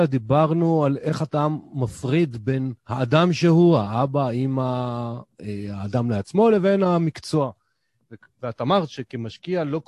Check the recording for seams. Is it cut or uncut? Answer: uncut